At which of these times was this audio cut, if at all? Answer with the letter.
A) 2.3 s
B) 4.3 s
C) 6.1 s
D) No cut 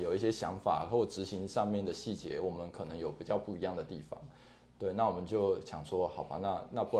D